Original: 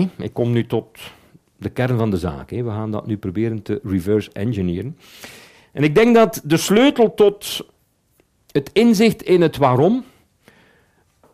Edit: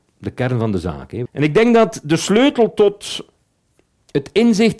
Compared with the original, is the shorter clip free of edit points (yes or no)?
no